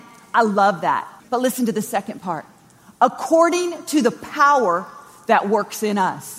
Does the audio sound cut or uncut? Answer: cut